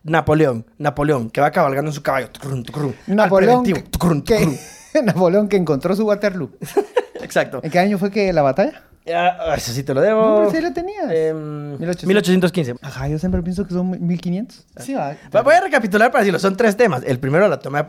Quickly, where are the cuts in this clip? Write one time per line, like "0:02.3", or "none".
0:12.8
0:14.7